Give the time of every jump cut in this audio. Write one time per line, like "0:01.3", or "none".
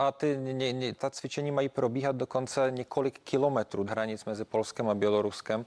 0:01.0
0:03.9